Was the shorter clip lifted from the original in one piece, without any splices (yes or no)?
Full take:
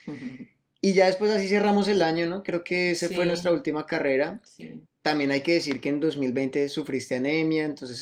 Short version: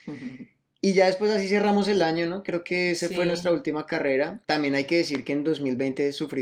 no